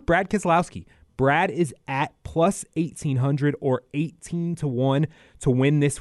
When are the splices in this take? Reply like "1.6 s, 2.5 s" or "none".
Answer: none